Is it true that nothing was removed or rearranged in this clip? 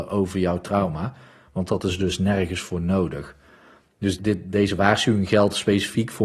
no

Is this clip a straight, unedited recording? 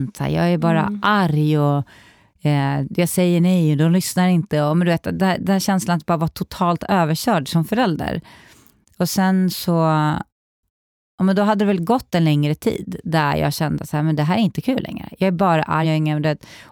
no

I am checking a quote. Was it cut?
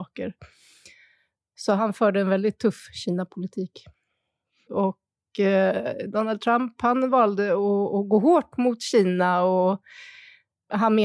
yes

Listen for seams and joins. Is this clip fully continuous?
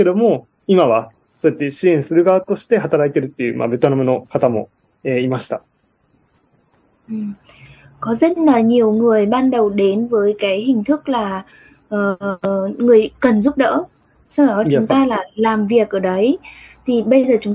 yes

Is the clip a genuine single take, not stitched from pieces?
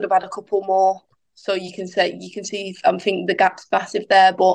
no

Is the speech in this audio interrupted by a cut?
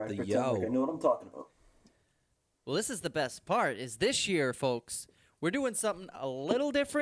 no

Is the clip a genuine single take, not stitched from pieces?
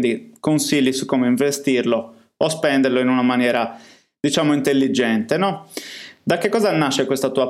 yes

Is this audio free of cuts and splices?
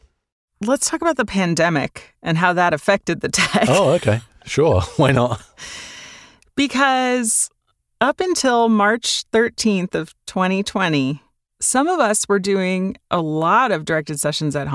yes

